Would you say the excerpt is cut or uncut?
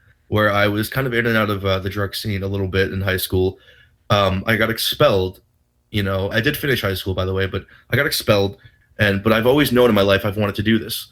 cut